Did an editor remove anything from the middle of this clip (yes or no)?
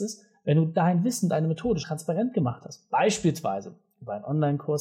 yes